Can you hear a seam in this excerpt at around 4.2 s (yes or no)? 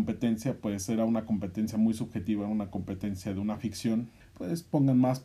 yes